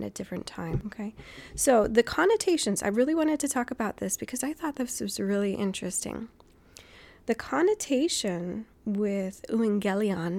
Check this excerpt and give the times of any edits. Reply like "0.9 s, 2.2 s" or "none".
none